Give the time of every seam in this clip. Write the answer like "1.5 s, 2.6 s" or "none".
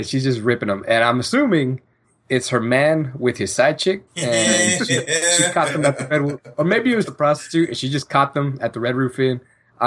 4.1 s, 7.1 s